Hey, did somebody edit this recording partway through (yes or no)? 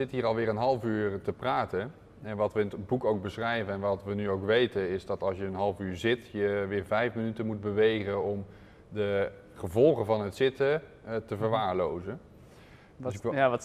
no